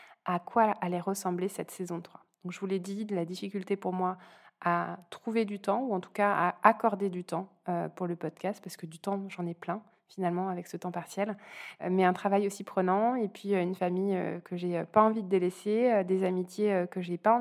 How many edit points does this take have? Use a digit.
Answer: 0